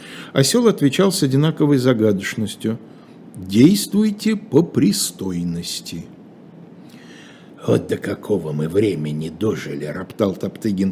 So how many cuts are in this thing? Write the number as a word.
zero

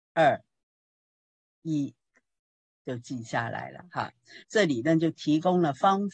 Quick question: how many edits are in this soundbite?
one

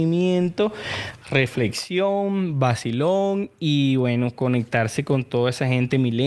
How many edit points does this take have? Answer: zero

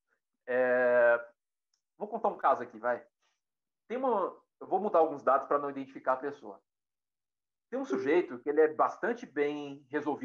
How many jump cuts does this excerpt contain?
zero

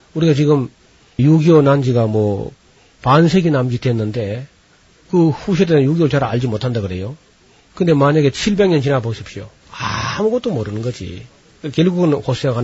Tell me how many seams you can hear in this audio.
zero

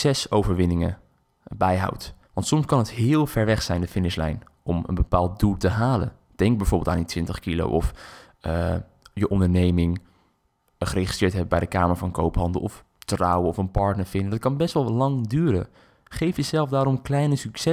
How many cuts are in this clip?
one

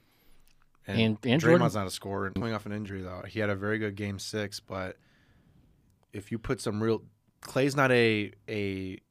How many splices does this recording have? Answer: one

